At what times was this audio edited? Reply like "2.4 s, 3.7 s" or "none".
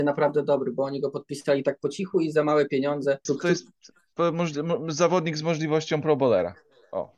3.3 s